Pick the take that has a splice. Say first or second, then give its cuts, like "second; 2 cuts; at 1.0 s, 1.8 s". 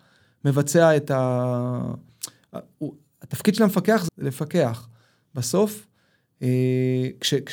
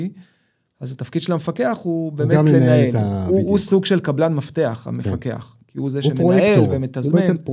first; 1 cut; at 4.1 s